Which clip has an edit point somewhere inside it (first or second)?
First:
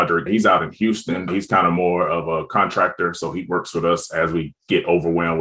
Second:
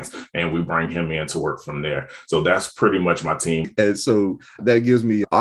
second